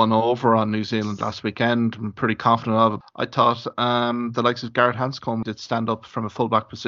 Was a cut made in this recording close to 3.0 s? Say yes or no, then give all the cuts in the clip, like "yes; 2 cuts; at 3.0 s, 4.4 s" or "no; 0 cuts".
yes; 2 cuts; at 3.0 s, 5.4 s